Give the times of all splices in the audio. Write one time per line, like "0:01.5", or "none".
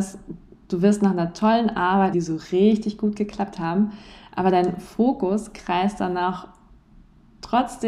0:02.1